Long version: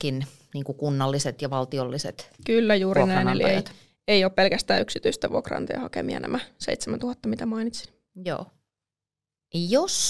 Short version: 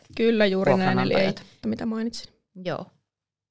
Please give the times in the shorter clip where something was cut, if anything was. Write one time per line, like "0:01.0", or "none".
0:01.6